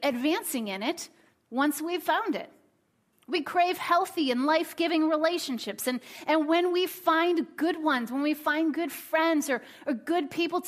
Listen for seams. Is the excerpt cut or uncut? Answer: uncut